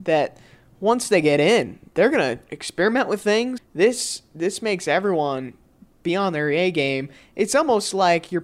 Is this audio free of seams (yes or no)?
no